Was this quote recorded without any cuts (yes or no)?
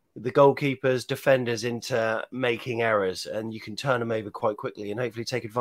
yes